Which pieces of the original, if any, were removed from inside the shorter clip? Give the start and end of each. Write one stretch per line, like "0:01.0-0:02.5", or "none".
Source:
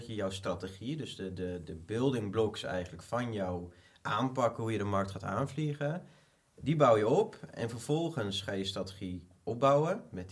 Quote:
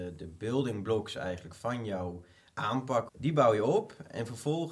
0:04.6-0:06.5

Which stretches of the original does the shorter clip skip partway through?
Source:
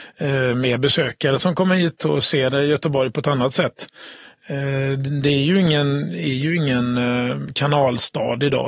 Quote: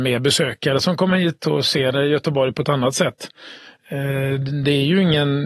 none

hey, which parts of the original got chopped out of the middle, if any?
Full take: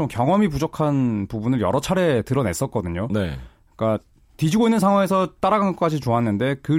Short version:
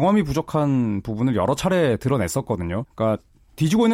0:03.1-0:03.6

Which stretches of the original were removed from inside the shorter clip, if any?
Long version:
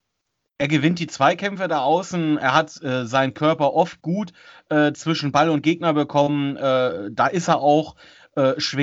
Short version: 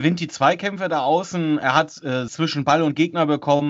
0:03.1-0:05.0

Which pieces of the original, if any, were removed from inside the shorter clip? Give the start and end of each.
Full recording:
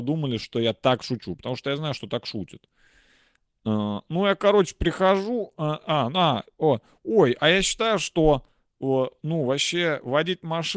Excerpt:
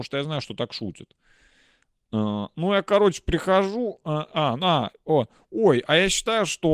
none

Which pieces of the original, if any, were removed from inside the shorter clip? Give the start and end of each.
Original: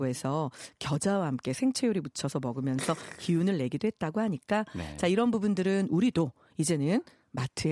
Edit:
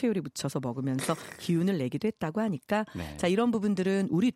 none

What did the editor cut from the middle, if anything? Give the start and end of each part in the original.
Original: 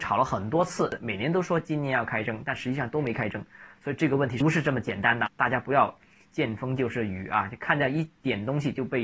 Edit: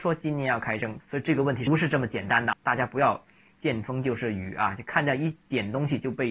0:02.5-0:03.7

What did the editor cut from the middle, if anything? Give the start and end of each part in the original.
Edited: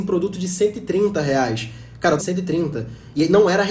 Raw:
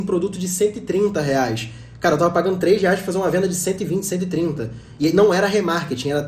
0:02.2-0:04.0

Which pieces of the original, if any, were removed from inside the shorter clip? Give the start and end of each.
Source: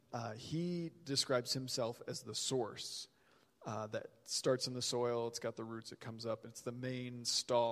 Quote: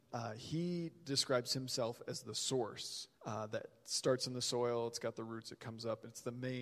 0:03.1-0:03.6

